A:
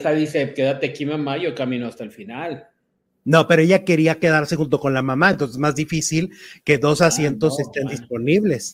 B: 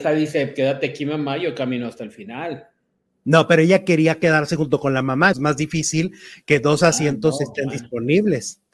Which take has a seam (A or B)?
B